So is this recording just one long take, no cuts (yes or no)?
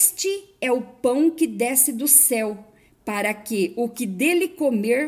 yes